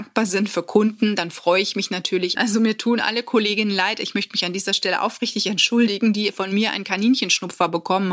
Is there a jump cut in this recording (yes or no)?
yes